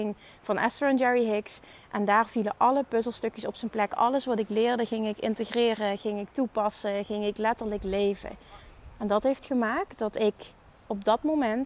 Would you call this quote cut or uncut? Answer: uncut